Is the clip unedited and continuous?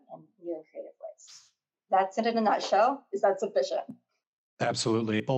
yes; 0 cuts

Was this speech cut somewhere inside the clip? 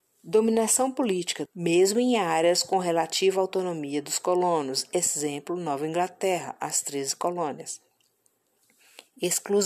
yes; 1 cut; at 1.5 s

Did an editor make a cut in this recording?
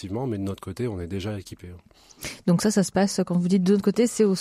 no; 0 cuts

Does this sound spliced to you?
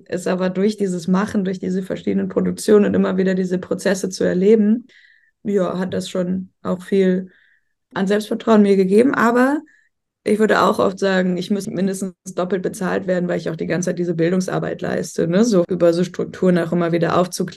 yes; 1 cut; at 11.6 s

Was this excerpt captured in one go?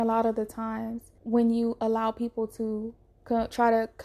no; 1 cut; at 1.2 s

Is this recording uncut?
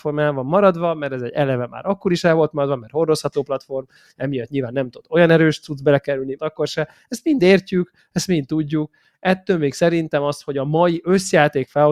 no; 1 cut; at 6.4 s

